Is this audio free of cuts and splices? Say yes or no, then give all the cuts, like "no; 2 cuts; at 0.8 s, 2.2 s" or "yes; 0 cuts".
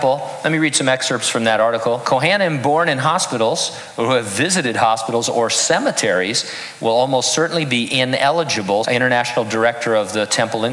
no; 2 cuts; at 2.0 s, 8.8 s